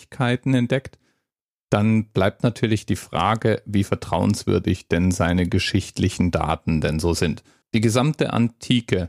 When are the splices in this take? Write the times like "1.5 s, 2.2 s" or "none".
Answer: 7.6 s